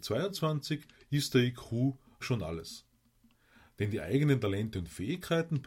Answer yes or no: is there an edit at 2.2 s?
yes